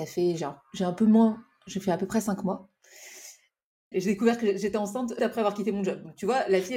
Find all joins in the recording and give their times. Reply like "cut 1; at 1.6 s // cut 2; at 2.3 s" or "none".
cut 1; at 3.9 s // cut 2; at 5.2 s